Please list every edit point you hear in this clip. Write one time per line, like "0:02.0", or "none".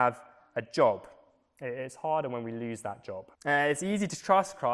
0:03.3